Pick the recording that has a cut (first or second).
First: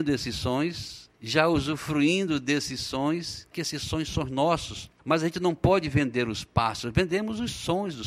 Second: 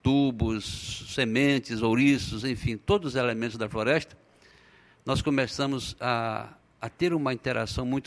first